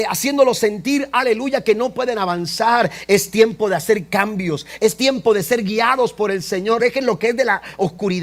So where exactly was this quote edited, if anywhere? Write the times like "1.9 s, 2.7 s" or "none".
4.8 s, 6.8 s